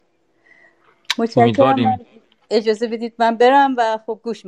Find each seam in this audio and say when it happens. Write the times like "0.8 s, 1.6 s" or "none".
none